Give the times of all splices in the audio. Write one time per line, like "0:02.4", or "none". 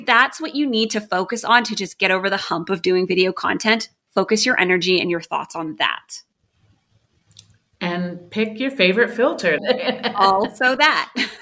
0:09.6